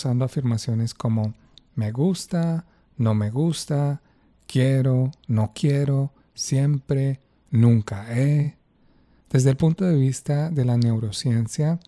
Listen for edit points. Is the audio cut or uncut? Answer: uncut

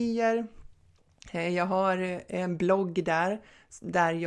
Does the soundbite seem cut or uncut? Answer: uncut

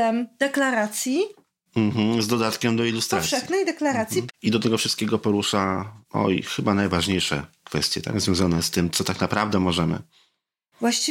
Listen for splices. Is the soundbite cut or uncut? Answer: cut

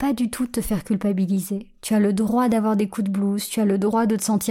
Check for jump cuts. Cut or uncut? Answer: uncut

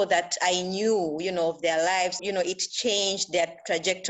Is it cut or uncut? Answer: cut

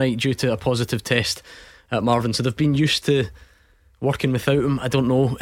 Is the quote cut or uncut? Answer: uncut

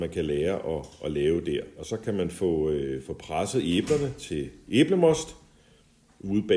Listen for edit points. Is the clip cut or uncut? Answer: uncut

